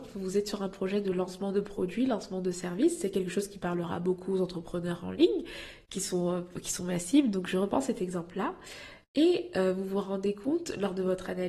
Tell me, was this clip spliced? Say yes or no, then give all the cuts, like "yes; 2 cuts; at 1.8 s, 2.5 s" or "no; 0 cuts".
no; 0 cuts